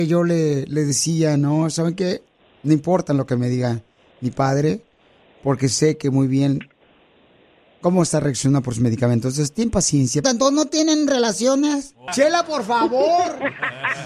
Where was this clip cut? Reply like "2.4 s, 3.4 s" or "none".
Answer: 10.2 s, 12.1 s

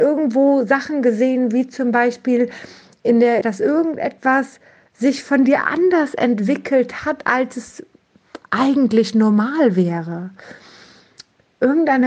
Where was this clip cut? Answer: 3.4 s

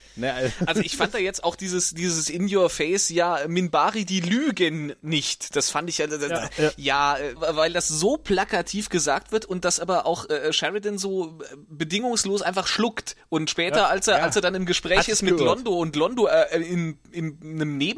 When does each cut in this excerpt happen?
11.6 s

